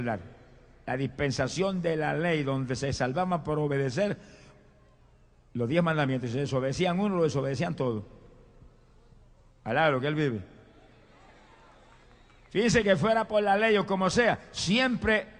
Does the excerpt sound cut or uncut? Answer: uncut